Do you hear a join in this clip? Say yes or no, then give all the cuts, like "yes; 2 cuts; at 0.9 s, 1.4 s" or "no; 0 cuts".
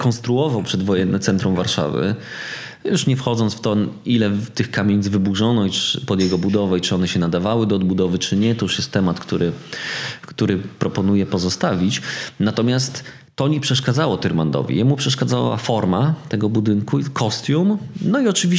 no; 0 cuts